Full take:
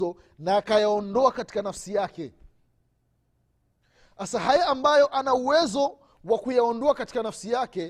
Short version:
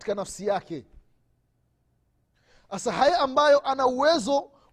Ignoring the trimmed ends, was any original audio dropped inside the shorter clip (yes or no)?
no